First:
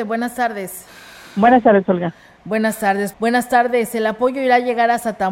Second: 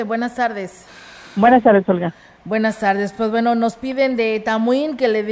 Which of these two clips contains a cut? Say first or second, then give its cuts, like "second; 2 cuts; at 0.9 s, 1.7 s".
first; 1 cut; at 3.1 s